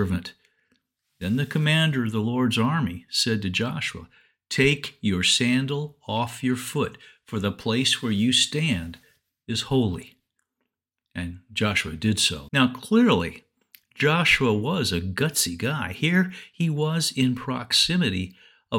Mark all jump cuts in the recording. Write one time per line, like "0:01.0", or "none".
0:12.5

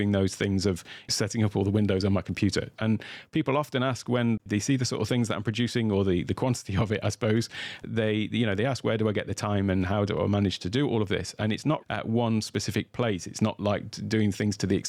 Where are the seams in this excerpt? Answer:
0:02.8
0:11.8

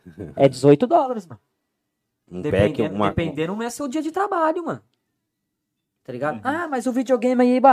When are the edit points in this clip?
none

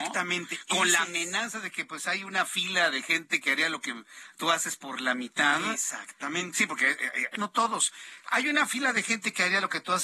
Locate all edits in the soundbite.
0:07.4

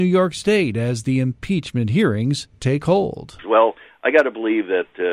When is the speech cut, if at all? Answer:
0:03.4

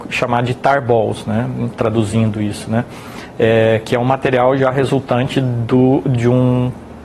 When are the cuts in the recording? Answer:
0:01.8

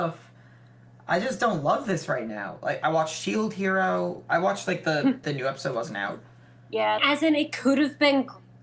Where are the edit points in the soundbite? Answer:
0:05.2
0:07.0

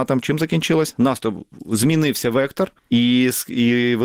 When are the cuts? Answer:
0:02.8

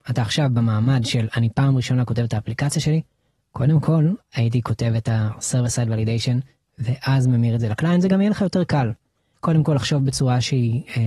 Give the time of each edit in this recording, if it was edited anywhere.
none

